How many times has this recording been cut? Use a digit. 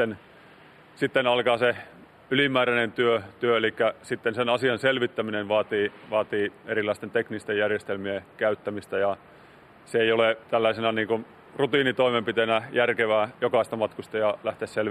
2